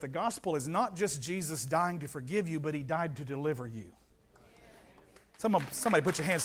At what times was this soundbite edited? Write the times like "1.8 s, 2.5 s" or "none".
none